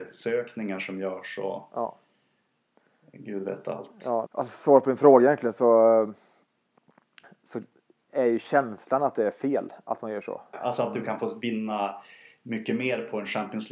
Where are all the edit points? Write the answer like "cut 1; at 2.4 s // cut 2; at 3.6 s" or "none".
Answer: cut 1; at 4.3 s // cut 2; at 10.5 s